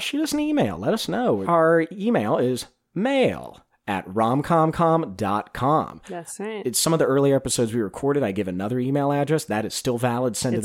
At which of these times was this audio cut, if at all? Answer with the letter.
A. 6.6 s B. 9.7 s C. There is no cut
C